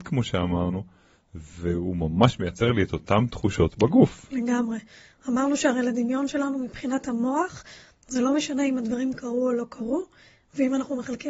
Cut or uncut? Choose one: uncut